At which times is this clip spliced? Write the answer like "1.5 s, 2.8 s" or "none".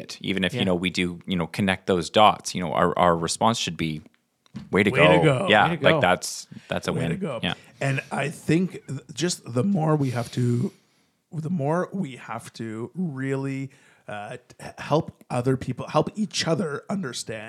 none